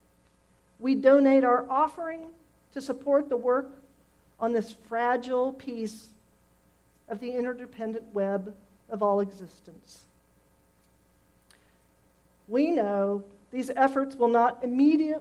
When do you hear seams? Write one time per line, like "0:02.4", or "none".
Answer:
none